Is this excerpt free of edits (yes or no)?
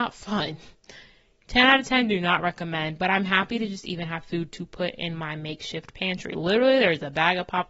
yes